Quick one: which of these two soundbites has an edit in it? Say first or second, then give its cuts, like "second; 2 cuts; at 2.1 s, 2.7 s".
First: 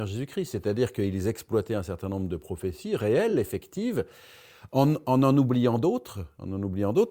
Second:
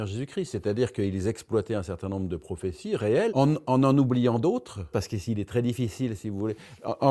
second; 2 cuts; at 3.3 s, 4.9 s